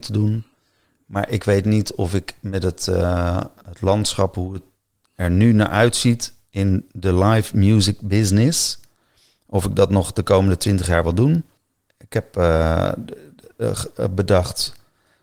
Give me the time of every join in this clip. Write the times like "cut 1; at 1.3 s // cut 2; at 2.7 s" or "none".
none